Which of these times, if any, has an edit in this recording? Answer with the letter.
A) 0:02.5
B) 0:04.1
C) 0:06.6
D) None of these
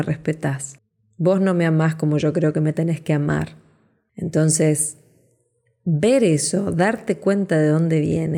B